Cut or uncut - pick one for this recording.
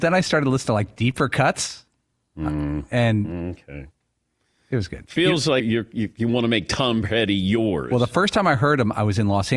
cut